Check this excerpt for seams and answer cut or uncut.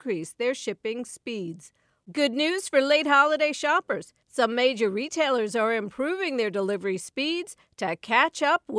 cut